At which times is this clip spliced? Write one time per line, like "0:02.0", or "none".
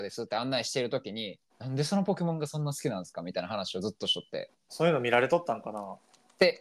0:01.5
0:04.7